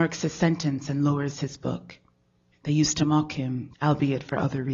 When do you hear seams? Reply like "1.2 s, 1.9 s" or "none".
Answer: 2.5 s, 3.7 s